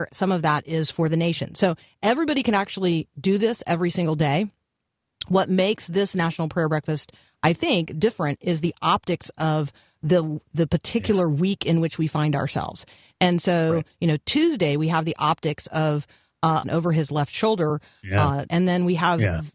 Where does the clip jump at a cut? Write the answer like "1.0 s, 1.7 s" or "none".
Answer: 16.6 s, 18.5 s